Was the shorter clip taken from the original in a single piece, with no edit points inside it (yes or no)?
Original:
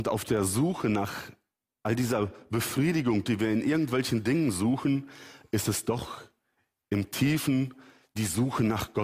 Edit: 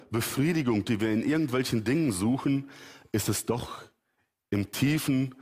yes